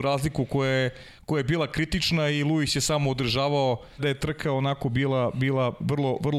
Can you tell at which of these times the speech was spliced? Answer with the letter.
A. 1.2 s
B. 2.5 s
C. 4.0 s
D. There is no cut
C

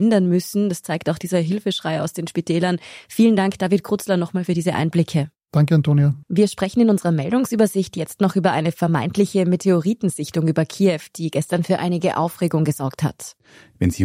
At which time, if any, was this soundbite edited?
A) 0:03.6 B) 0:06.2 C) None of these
B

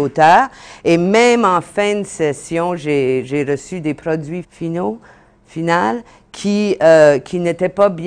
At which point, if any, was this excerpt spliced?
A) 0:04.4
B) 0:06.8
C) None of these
A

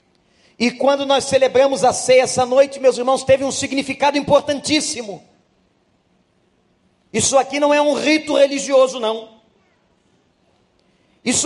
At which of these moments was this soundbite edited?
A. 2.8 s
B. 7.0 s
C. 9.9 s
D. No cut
D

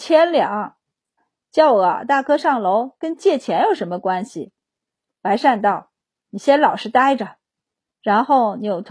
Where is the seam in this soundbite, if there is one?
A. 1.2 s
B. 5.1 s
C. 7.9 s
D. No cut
A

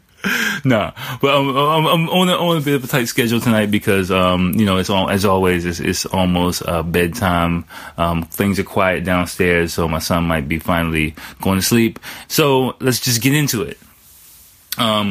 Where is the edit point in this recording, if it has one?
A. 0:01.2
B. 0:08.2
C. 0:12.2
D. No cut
C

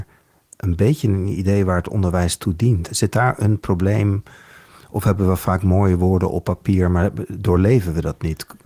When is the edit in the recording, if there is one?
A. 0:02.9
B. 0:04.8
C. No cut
A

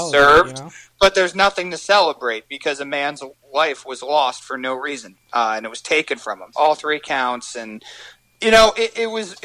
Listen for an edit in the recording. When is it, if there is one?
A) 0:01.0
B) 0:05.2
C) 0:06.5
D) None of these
C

